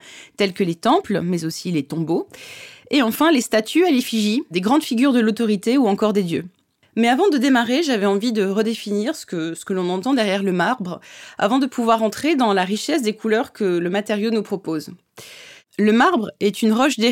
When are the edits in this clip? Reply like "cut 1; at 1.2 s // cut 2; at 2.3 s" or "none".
cut 1; at 4.5 s // cut 2; at 6.9 s